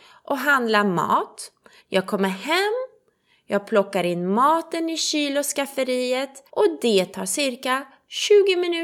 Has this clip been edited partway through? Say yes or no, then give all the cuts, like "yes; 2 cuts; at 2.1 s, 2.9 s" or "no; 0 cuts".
yes; 2 cuts; at 1.8 s, 6.5 s